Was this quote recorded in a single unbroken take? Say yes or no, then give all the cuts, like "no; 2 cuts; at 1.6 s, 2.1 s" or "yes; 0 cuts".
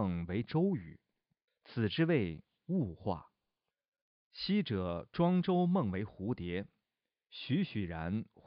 no; 2 cuts; at 1.5 s, 4.2 s